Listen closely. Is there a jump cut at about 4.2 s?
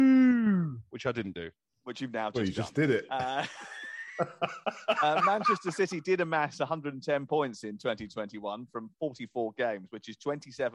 no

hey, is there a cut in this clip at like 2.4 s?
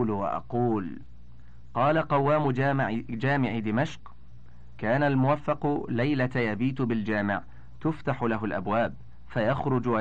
no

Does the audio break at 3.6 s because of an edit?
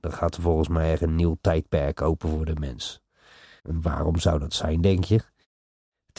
yes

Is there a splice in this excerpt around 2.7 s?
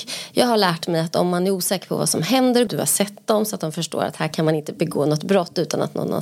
yes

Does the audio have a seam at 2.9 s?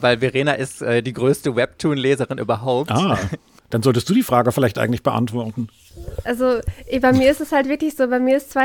no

